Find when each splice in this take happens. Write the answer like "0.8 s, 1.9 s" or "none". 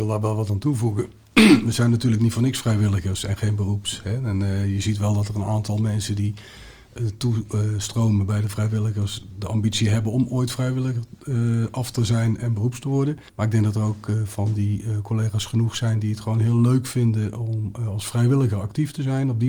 13.3 s